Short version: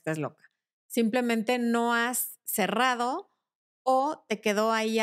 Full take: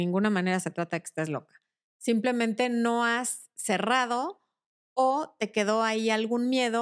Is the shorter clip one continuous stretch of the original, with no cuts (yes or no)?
yes